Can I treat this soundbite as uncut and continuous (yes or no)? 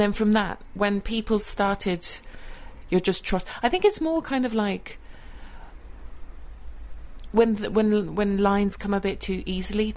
no